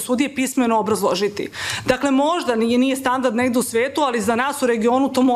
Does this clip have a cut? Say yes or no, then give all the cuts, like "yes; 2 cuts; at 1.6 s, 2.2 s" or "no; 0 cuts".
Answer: no; 0 cuts